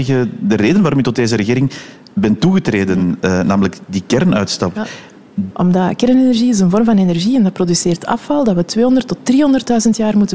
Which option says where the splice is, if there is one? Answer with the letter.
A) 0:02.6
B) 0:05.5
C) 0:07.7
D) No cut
B